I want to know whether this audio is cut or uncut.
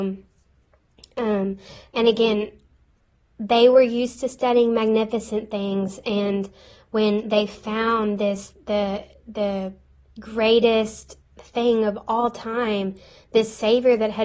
uncut